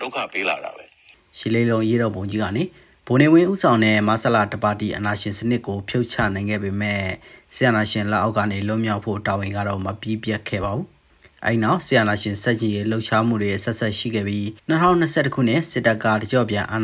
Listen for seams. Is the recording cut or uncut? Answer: cut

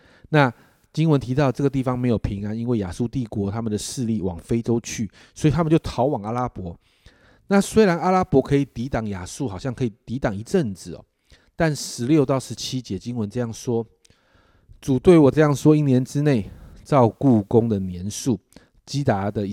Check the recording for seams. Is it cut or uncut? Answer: uncut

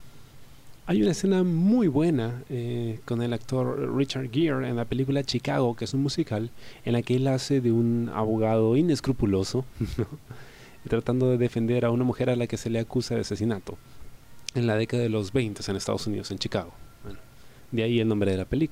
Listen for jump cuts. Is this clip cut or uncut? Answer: uncut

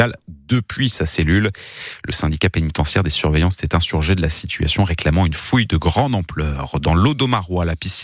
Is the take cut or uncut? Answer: uncut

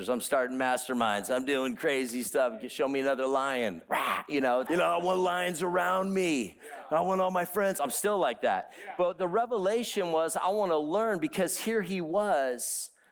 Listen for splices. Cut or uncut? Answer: cut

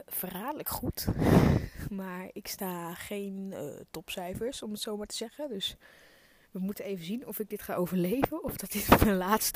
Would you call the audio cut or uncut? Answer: uncut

